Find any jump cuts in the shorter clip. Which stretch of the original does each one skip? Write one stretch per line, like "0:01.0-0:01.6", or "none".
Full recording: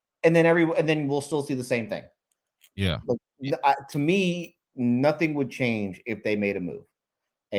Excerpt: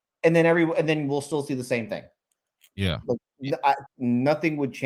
0:03.9-0:04.6